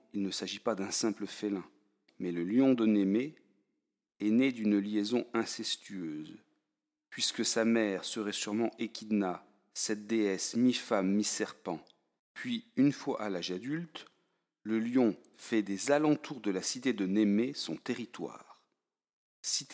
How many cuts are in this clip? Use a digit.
2